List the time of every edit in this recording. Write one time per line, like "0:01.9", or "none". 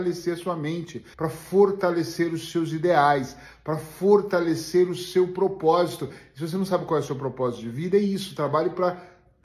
0:01.1